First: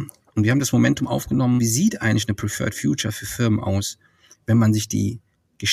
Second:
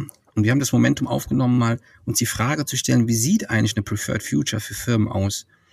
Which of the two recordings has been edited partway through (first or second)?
first